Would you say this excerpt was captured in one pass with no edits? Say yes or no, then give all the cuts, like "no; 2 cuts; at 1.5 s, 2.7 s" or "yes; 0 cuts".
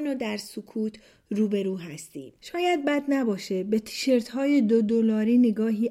no; 1 cut; at 2.3 s